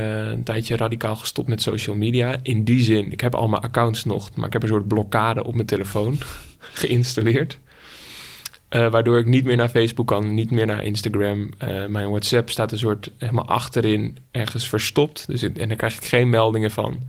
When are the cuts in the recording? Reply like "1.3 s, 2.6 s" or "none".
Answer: none